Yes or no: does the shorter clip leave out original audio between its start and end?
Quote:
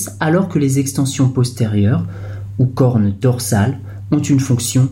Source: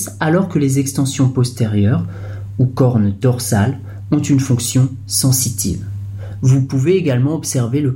no